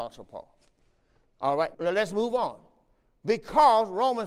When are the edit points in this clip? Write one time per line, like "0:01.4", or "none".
0:01.7